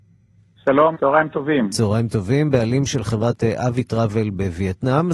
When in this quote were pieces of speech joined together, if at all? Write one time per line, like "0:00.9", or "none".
0:00.9